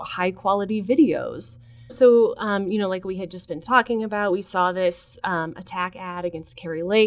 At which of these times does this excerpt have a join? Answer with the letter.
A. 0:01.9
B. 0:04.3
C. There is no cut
A